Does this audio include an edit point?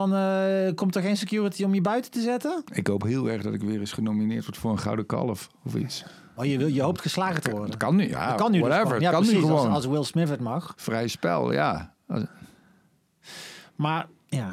yes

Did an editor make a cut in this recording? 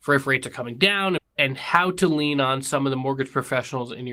yes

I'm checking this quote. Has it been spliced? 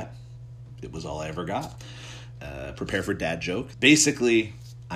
yes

